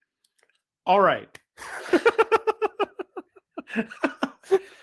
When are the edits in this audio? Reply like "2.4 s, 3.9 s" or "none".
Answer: none